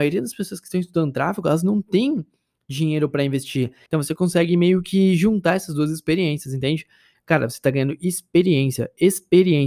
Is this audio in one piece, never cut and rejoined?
no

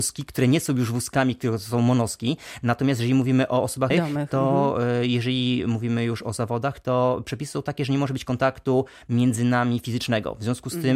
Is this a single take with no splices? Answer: no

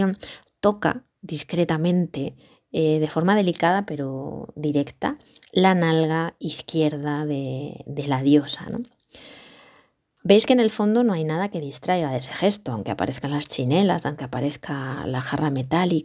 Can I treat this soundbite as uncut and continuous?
yes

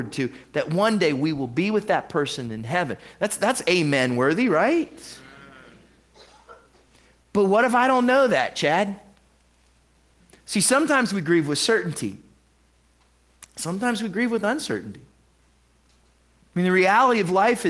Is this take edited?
no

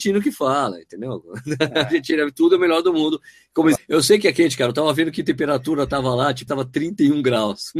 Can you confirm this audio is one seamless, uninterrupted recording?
no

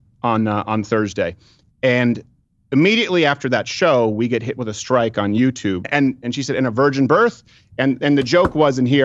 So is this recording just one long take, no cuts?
no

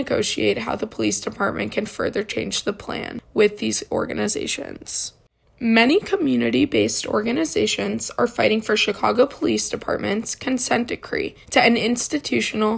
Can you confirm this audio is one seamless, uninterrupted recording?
no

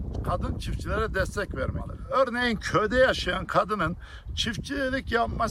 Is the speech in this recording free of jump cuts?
yes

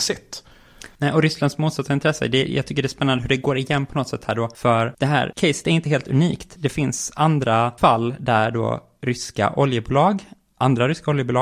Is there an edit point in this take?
no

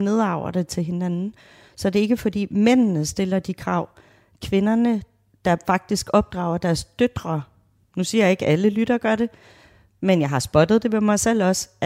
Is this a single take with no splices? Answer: no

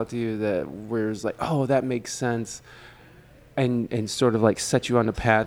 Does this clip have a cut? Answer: no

